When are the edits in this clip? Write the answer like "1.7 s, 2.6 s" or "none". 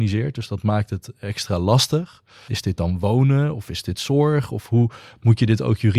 2.5 s